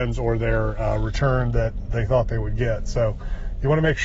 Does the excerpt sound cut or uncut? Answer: uncut